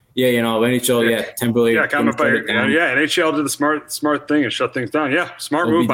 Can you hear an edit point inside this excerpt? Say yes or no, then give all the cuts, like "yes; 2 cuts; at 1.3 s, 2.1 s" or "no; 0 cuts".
no; 0 cuts